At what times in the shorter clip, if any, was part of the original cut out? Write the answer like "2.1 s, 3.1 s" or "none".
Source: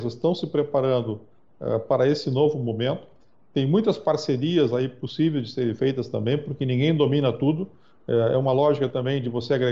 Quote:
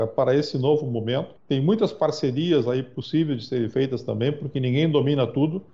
1.4 s

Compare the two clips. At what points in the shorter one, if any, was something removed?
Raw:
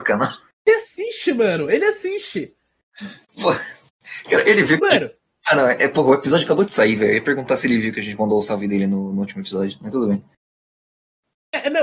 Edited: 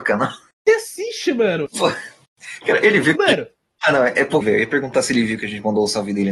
1.7 s, 4.4 s

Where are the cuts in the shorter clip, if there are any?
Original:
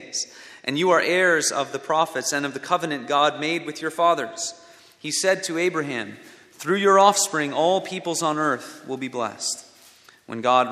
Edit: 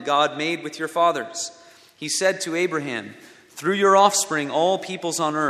none

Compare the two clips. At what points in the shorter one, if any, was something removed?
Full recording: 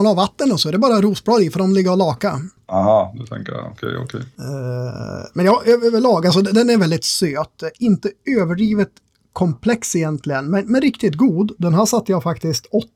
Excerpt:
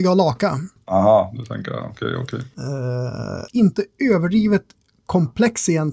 3.5 s

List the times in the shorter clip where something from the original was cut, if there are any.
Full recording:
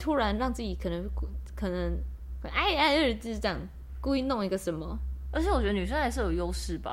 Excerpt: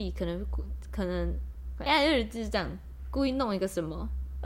1.9 s

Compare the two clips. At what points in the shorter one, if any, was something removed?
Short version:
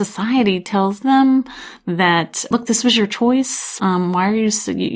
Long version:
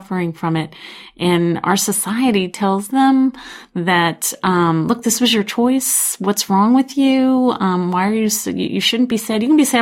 2.5 s, 3.8 s

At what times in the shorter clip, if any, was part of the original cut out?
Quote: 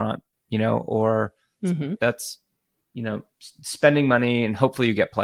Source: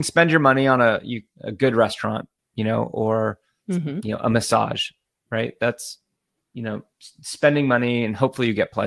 2.0 s

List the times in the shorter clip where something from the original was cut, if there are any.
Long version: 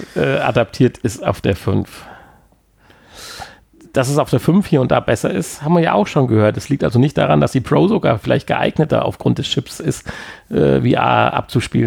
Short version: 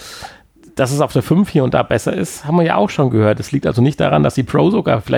none

